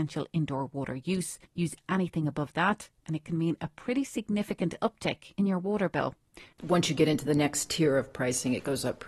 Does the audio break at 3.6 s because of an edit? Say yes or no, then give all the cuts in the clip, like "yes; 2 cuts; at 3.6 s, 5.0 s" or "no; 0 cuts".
no; 2 cuts; at 1.5 s, 6.5 s